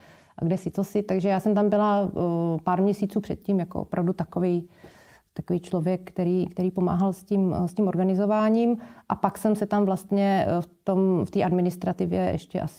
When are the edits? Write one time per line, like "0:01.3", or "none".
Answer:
none